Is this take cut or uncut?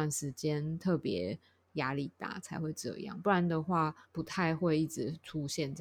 cut